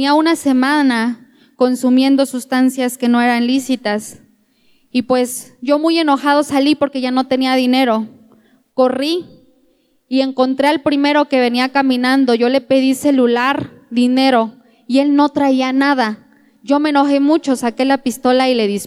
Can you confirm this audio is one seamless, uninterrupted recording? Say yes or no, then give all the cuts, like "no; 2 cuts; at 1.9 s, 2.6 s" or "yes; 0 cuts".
yes; 0 cuts